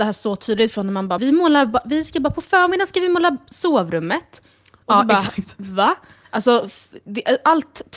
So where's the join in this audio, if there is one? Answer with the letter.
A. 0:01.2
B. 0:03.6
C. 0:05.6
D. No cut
A